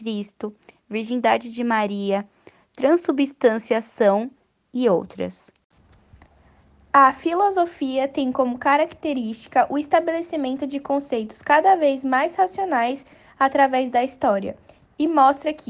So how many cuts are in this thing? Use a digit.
0